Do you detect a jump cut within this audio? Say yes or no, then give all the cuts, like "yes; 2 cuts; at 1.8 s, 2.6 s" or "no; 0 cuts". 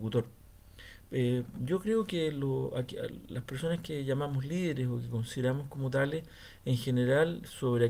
no; 0 cuts